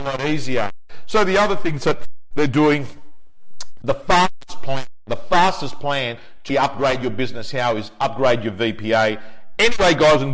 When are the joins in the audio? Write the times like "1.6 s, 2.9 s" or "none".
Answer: 3.8 s, 6.5 s